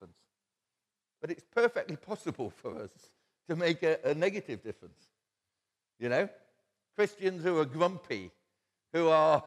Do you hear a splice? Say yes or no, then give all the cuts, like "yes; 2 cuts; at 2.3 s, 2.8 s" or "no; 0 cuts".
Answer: no; 0 cuts